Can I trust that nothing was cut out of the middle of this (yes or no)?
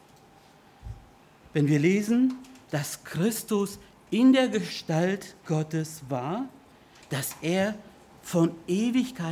no